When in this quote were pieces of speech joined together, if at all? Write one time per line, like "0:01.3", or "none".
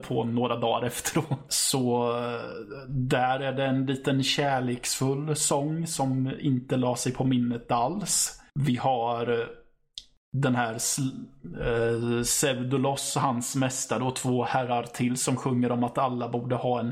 0:01.5
0:08.5